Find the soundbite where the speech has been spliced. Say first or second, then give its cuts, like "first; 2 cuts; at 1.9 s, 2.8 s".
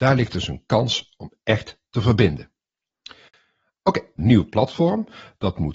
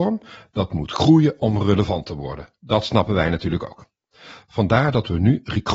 first; 1 cut; at 4.2 s